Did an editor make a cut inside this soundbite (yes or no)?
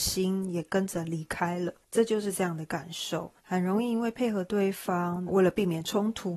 yes